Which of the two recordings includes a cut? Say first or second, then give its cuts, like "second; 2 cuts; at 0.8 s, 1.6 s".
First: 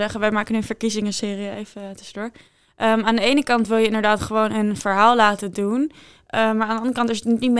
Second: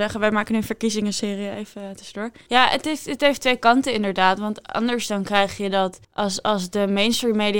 second; 2 cuts; at 2.5 s, 6.0 s